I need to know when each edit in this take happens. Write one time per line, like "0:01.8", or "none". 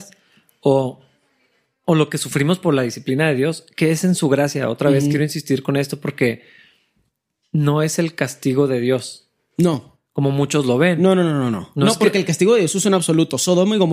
none